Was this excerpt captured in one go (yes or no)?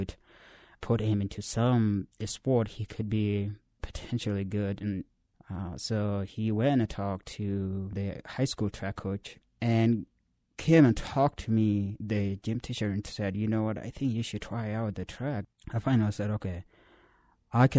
yes